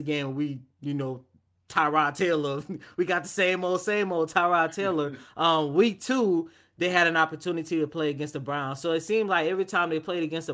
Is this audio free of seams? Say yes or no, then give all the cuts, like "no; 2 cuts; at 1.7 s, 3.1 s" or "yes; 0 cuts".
yes; 0 cuts